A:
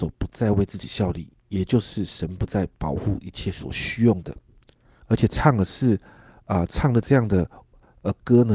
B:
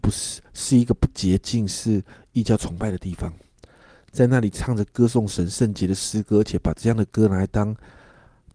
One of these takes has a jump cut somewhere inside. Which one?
A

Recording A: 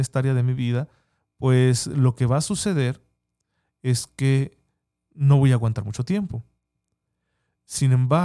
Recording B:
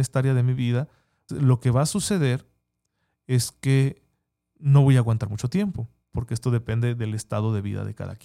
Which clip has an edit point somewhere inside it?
B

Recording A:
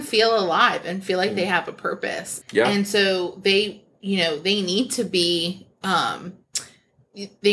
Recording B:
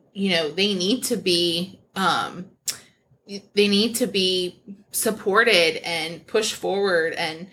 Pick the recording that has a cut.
A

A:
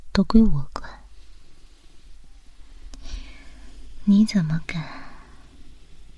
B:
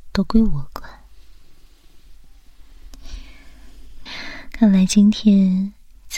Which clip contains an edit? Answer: B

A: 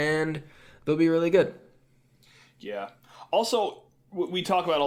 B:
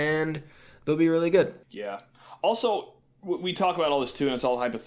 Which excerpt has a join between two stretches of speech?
B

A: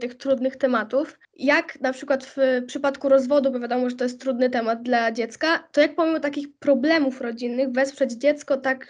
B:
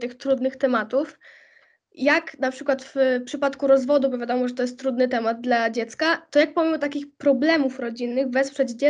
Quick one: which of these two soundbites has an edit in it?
A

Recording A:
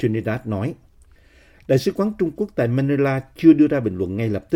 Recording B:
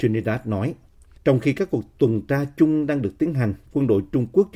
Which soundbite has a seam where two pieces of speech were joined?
B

